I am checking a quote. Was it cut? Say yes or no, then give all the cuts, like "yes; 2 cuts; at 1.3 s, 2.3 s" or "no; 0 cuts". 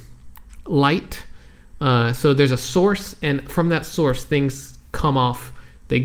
no; 0 cuts